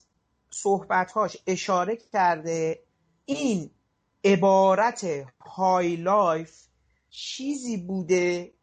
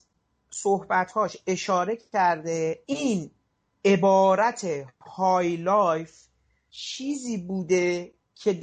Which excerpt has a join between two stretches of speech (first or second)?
second